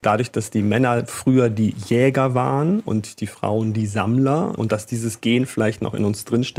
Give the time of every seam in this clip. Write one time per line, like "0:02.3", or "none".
none